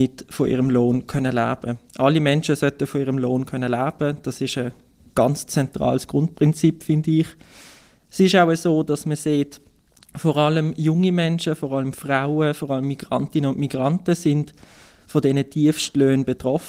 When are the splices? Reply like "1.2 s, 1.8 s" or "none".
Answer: none